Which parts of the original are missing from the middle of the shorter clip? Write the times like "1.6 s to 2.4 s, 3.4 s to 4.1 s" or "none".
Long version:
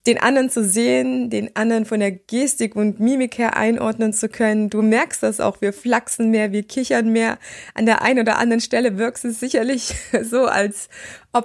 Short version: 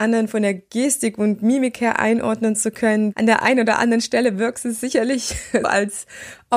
4.7 s to 7.7 s, 10.2 s to 10.5 s